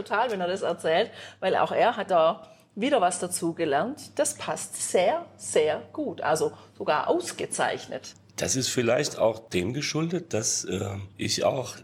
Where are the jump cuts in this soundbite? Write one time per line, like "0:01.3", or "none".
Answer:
none